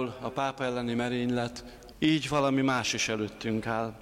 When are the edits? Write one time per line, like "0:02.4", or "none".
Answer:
0:01.9